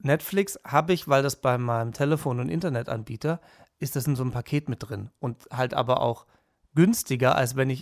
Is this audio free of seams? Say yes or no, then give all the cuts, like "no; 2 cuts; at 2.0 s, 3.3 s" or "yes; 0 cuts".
yes; 0 cuts